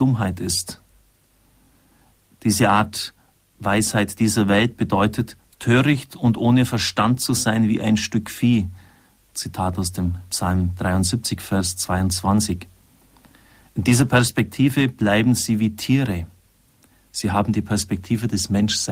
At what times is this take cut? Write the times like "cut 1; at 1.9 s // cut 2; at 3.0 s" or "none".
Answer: none